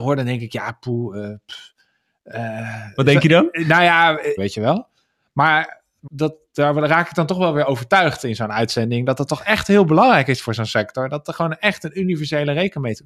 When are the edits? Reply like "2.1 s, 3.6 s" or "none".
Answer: 4.4 s, 6.1 s